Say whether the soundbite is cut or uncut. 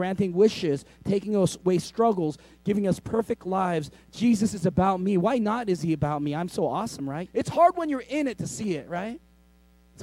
cut